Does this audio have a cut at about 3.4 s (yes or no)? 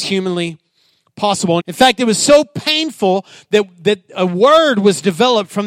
no